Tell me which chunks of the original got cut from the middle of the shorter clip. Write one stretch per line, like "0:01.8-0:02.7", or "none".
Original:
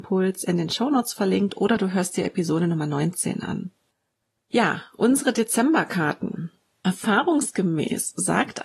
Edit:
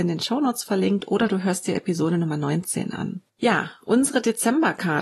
0:03.8-0:04.4

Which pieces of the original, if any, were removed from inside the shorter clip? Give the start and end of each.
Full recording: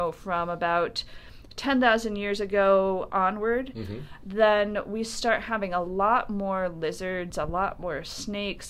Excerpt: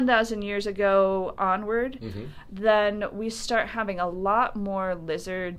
none

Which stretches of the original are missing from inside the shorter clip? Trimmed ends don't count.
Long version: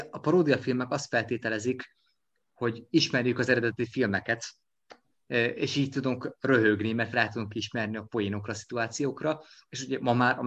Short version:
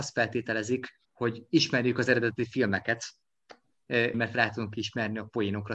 0:02.0-0:02.5
0:05.5-0:06.9

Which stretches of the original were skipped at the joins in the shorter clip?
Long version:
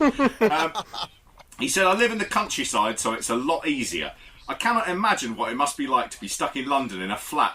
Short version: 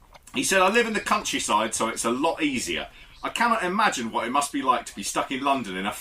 none

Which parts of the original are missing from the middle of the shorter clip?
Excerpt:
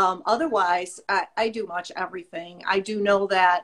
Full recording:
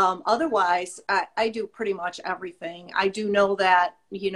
0:01.7-0:02.0

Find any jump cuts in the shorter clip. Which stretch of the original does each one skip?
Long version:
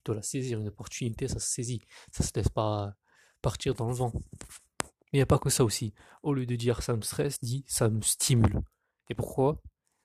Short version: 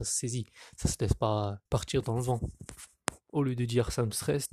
0:03.0-0:03.4
0:05.0-0:06.2

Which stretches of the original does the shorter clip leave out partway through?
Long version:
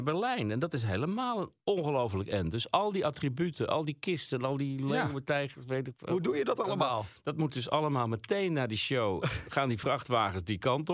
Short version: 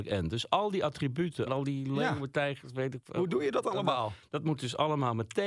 0:03.7-0:04.4

